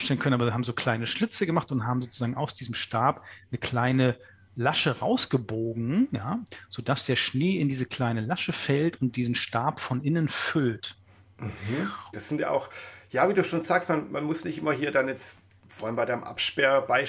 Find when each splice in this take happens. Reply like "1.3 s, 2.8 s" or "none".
12.1 s